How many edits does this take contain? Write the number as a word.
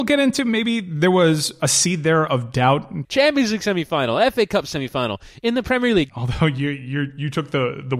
two